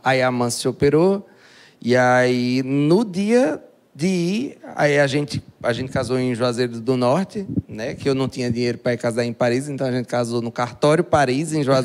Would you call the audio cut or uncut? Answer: uncut